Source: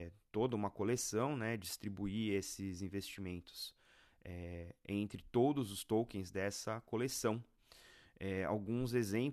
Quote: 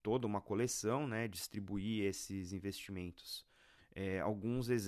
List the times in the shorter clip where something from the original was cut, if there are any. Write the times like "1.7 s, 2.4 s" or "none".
3.8 s